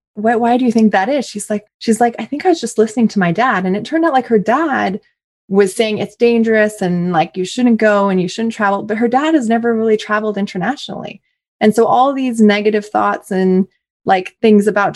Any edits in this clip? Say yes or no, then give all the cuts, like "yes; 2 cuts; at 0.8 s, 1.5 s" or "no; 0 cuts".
yes; 1 cut; at 1.7 s